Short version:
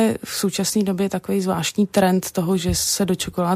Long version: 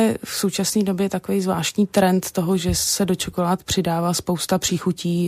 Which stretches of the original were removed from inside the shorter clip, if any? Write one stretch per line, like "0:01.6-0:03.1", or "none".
none